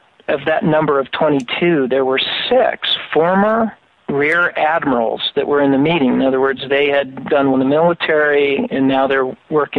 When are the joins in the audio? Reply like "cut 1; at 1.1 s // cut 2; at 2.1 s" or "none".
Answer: cut 1; at 7.5 s // cut 2; at 8.7 s

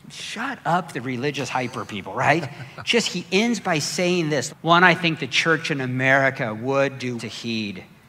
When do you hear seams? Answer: cut 1; at 4.5 s // cut 2; at 7.2 s

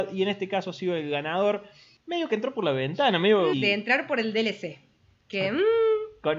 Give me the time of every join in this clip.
cut 1; at 3.5 s

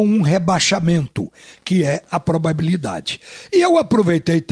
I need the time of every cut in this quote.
none

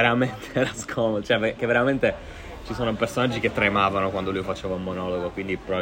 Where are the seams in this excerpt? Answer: none

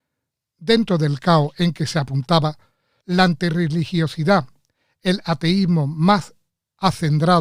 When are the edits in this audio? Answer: cut 1; at 3.0 s

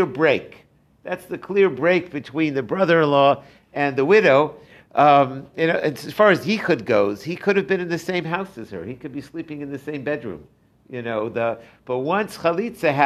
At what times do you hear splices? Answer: none

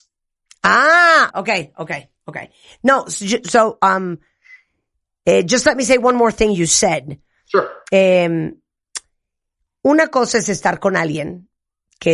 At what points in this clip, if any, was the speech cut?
cut 1; at 1.3 s

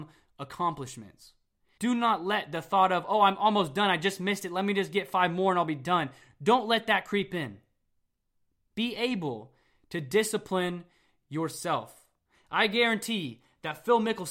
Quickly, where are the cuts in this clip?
cut 1; at 1.8 s

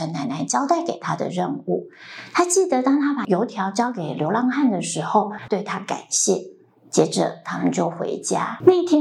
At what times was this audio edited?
cut 1; at 5.5 s

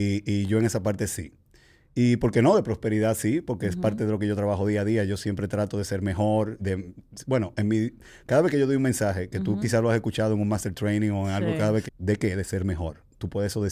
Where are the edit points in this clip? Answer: cut 1; at 6.6 s // cut 2; at 11.9 s

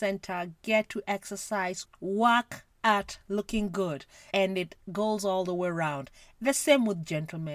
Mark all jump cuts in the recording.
cut 1; at 1.8 s // cut 2; at 4.3 s

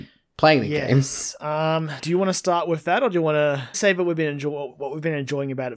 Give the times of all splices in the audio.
cut 1; at 2.0 s // cut 2; at 3.7 s

